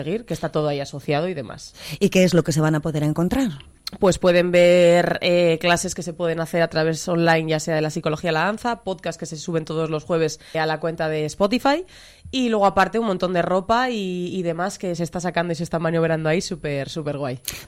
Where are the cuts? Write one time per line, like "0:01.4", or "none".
0:10.5